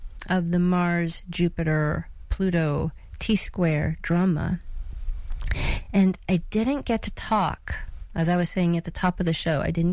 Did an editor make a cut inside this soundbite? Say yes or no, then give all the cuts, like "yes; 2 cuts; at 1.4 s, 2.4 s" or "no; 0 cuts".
no; 0 cuts